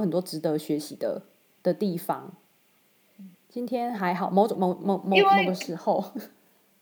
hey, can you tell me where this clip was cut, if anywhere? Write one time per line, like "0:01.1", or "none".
0:03.4
0:04.5